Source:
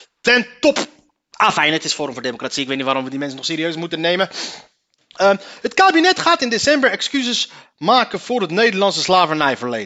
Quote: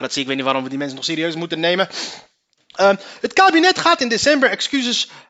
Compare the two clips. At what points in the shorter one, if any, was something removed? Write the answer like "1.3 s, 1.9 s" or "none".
none